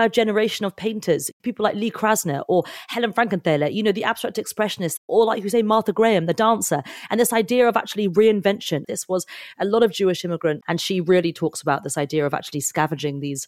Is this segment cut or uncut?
cut